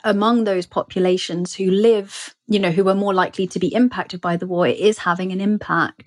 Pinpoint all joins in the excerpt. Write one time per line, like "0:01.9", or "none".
none